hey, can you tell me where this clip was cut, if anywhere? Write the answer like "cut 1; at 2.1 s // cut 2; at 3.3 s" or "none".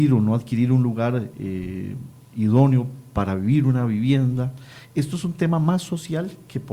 none